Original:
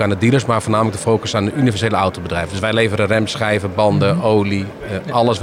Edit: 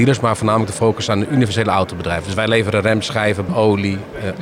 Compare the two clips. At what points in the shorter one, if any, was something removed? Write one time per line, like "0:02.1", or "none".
0:03.5